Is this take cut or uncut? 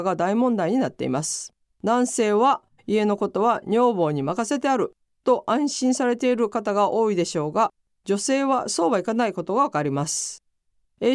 cut